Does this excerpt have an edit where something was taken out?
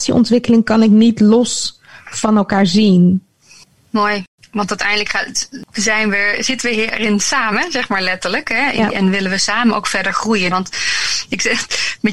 yes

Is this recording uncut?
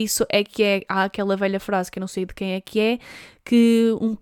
yes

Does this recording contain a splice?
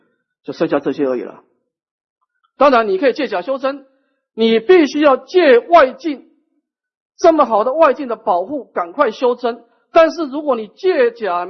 yes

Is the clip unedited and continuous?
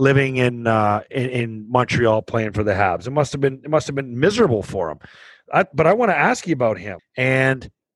no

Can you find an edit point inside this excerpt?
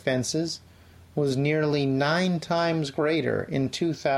no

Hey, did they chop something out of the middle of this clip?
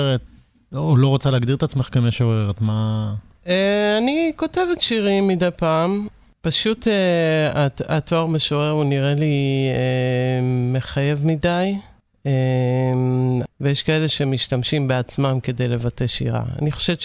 yes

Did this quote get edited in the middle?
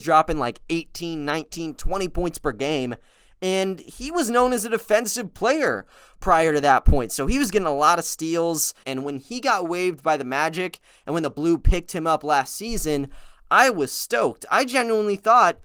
yes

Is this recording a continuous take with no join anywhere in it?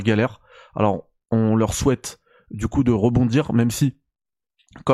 yes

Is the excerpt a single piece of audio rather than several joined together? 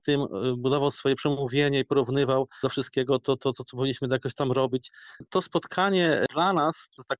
yes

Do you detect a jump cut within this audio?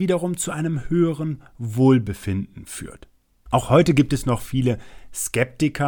yes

